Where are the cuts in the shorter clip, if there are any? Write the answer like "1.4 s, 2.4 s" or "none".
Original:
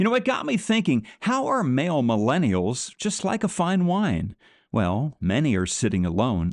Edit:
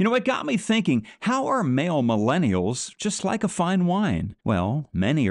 4.4 s